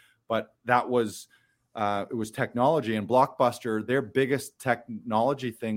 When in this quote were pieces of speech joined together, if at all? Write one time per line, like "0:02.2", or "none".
none